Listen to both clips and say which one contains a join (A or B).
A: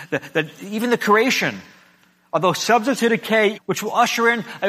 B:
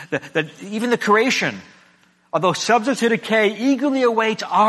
A